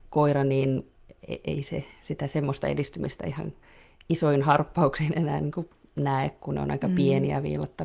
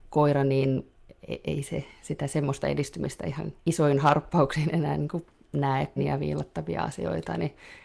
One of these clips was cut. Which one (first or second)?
second